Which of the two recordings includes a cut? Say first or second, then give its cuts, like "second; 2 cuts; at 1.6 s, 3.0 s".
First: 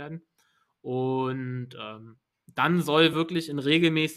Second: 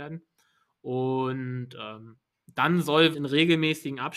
second; 1 cut; at 3.1 s